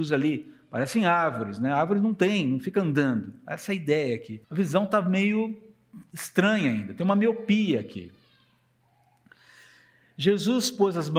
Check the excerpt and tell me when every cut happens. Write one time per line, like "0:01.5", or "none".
0:04.4